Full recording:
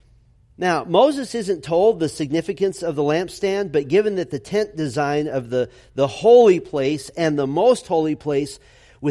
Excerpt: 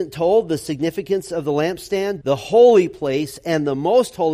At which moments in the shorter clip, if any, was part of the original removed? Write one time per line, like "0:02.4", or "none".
0:02.2